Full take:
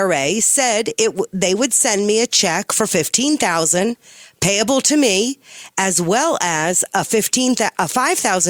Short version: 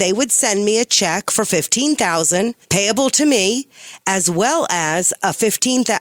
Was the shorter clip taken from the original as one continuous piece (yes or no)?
no